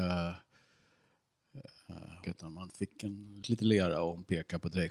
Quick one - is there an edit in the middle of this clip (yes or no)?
yes